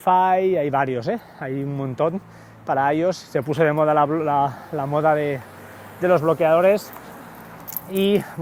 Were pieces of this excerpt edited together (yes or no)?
no